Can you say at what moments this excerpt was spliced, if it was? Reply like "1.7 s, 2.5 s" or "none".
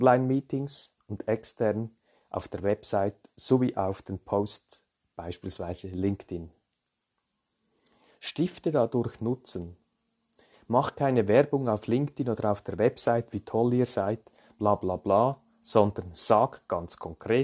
none